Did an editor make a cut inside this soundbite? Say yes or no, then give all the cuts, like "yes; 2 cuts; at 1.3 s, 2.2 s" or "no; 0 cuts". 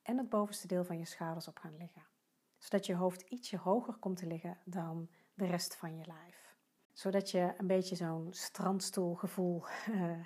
yes; 1 cut; at 6.8 s